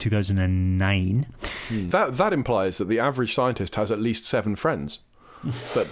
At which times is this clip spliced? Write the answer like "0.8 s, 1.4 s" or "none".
1.9 s